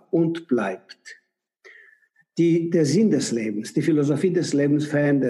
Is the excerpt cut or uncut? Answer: uncut